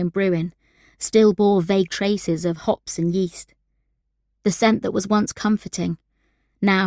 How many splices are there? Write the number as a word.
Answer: zero